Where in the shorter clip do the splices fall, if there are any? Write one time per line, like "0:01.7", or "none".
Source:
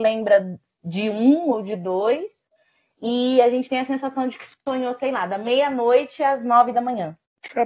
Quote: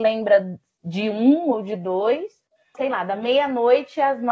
0:02.7